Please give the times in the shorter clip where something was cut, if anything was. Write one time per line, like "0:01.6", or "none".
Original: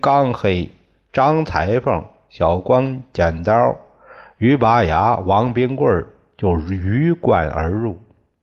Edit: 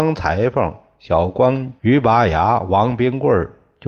0:01.8

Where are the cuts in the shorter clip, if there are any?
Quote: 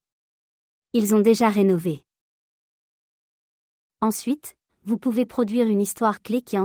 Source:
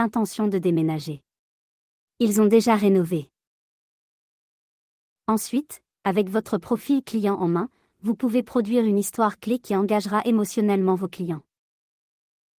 0:04.7

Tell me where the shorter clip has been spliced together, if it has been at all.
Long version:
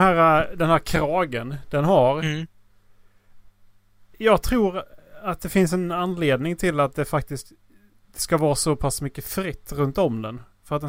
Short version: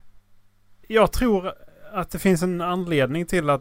none

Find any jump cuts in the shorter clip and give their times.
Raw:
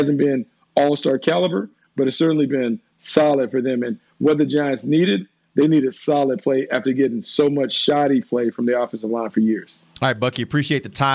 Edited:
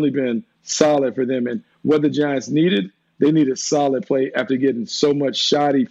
none

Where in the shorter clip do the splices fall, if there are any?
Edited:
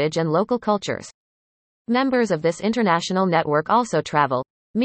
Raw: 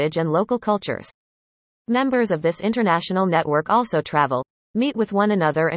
none

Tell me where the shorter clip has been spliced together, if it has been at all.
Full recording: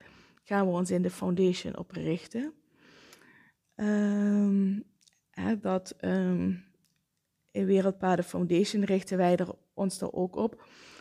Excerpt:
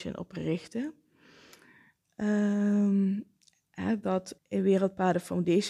0:04.4

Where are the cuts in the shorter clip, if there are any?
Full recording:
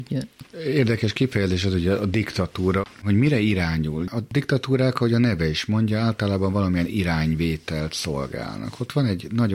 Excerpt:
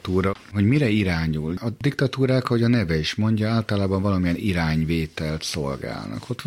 none

